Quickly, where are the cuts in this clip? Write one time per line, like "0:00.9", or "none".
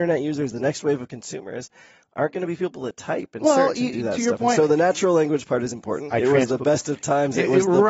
0:06.1